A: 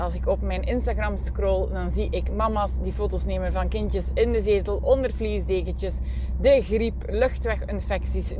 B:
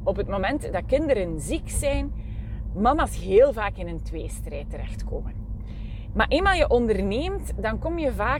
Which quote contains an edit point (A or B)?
B